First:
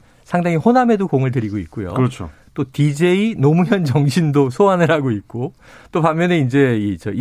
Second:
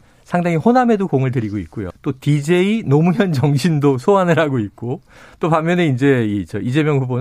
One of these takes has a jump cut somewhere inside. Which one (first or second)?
second